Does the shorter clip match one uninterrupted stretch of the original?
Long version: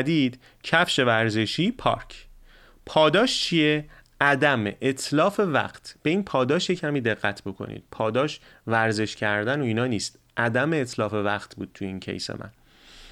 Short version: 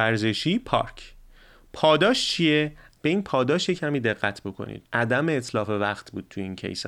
no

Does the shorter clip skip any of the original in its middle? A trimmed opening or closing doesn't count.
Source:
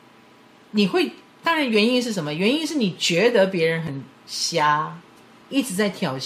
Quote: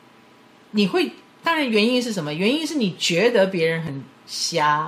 no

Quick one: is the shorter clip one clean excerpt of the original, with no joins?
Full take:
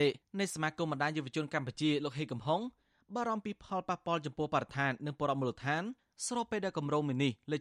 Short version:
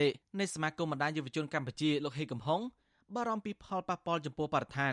yes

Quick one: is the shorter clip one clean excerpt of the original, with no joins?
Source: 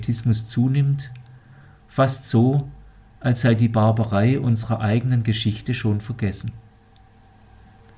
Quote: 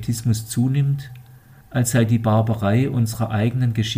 no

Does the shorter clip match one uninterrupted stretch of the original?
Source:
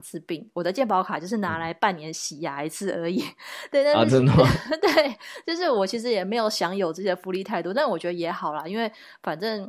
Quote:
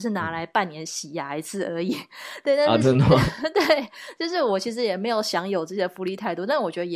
yes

